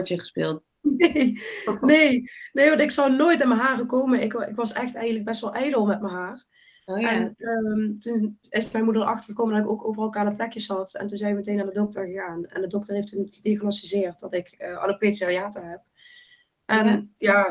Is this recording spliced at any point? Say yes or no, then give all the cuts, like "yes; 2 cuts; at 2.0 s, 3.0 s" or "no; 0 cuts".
no; 0 cuts